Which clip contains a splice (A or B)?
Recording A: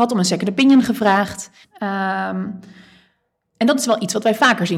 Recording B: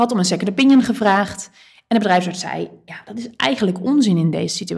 A